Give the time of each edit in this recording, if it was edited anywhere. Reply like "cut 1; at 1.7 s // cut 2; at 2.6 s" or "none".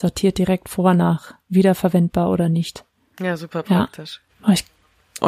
cut 1; at 4.3 s